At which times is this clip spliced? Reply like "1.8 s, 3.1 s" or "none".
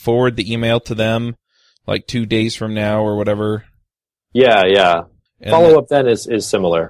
none